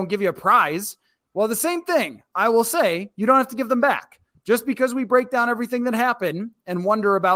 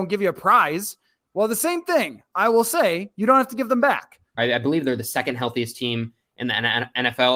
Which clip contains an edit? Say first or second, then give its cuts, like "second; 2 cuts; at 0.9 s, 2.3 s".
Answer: second; 1 cut; at 4.4 s